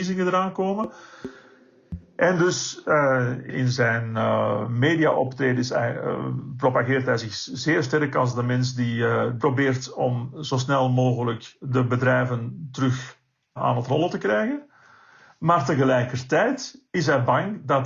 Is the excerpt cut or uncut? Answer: uncut